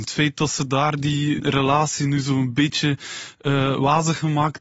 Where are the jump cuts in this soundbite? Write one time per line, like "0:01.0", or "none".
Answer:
0:01.4